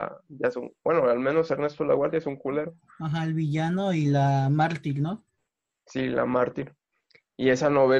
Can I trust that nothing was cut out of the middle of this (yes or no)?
yes